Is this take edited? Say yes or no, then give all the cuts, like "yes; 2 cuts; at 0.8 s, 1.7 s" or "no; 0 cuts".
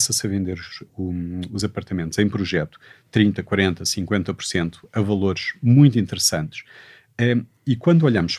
no; 0 cuts